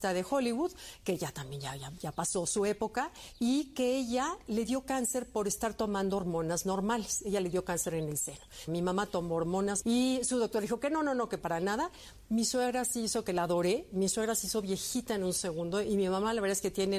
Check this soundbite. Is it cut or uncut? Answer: cut